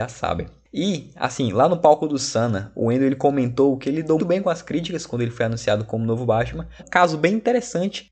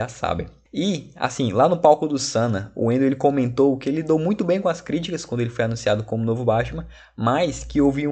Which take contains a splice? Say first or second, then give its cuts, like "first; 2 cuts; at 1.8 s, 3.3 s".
first; 2 cuts; at 4.2 s, 6.8 s